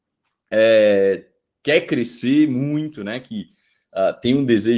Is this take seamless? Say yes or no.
yes